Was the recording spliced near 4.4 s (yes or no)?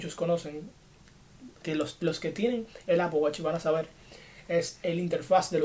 no